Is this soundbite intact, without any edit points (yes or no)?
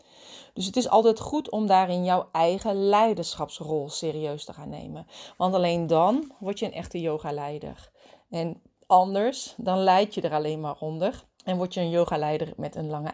no